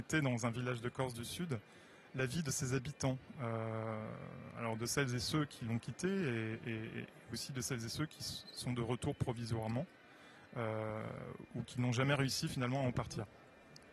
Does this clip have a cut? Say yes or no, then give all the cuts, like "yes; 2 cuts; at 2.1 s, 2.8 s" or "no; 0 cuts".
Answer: no; 0 cuts